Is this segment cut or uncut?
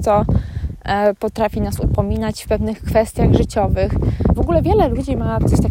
cut